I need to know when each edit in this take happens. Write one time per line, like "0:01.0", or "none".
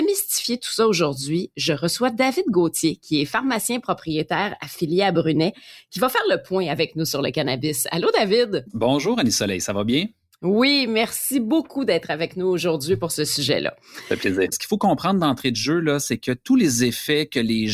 0:14.5